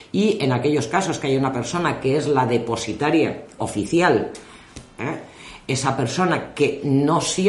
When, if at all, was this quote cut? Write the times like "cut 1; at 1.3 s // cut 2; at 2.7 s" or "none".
cut 1; at 3.6 s // cut 2; at 5.0 s